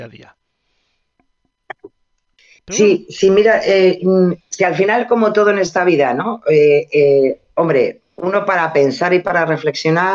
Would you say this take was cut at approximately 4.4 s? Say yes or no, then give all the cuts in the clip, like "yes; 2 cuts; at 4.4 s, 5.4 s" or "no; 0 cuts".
yes; 1 cut; at 4.4 s